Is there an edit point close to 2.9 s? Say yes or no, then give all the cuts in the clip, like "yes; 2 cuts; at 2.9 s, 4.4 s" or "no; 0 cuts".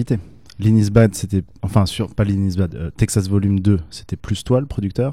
no; 0 cuts